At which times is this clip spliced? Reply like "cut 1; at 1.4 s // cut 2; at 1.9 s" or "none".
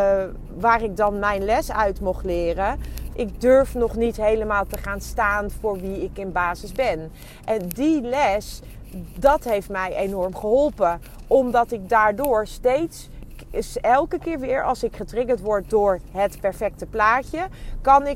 cut 1; at 3.1 s